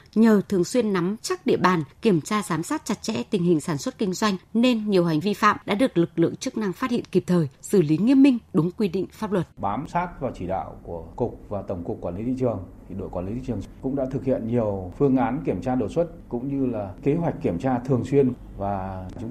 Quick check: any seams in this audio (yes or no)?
yes